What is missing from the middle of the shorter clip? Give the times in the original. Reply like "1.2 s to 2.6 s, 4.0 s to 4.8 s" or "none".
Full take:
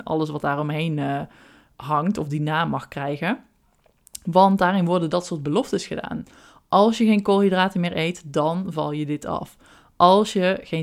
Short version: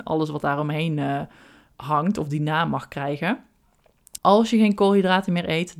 4.2 s to 6.7 s